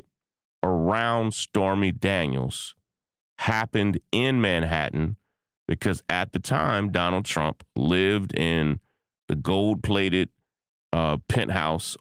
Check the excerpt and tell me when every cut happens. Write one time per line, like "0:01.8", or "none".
none